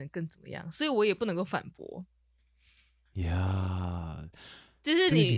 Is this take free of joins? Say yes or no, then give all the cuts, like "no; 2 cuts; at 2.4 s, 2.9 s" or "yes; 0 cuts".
yes; 0 cuts